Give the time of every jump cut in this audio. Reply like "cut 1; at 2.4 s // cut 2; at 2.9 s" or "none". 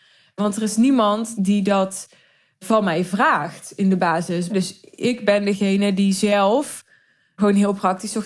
cut 1; at 1.4 s // cut 2; at 4.5 s